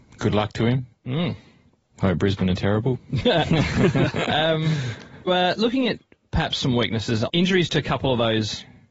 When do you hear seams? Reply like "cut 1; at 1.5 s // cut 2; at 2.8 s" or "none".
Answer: cut 1; at 5.3 s // cut 2; at 7.3 s

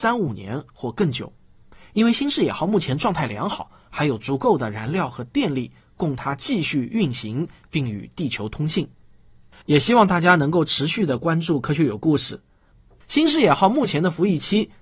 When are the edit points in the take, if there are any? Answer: cut 1; at 9.6 s // cut 2; at 13.0 s

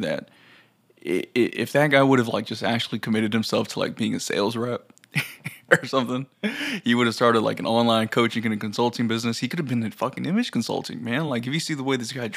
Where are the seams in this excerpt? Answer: none

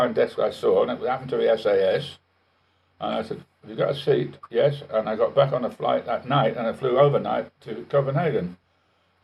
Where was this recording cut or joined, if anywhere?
none

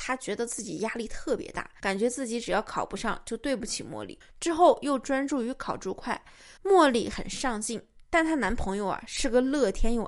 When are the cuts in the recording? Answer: cut 1; at 4.2 s // cut 2; at 6.6 s

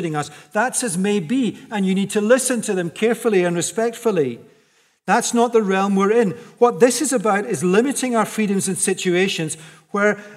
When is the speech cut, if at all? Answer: none

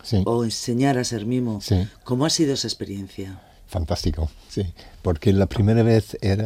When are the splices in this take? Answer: cut 1; at 4.5 s

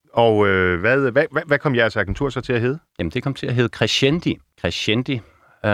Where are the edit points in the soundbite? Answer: cut 1; at 4.5 s

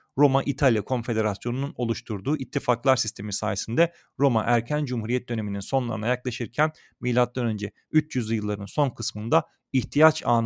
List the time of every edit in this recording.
none

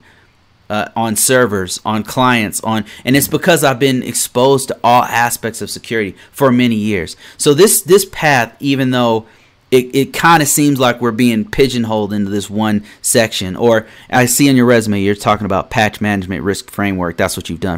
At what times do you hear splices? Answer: cut 1; at 9.9 s // cut 2; at 14.1 s

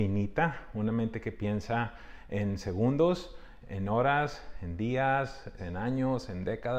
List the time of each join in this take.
cut 1; at 3.6 s // cut 2; at 5.6 s

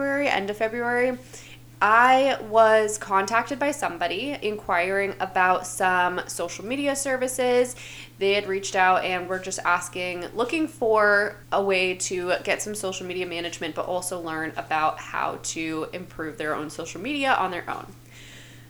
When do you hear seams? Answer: cut 1; at 11.4 s

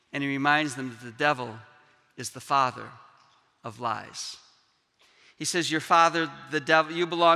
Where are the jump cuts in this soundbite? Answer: none

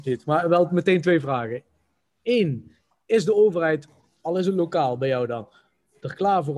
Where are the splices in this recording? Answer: none

